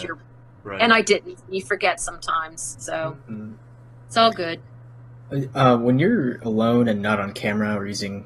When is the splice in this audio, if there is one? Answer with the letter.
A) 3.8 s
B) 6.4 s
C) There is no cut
B